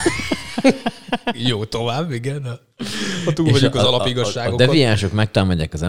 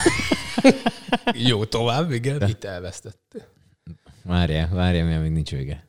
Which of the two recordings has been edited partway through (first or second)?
second